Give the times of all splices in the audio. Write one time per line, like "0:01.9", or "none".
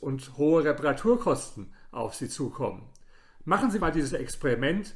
0:03.8